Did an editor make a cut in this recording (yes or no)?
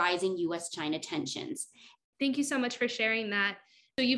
yes